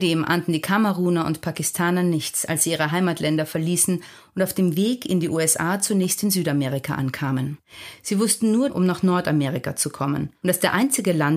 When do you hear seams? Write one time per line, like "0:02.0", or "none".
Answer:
0:08.7